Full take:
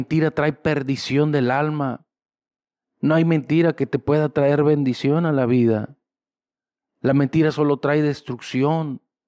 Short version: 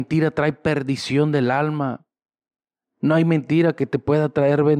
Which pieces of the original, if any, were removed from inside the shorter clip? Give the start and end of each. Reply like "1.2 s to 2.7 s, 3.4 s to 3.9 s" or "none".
none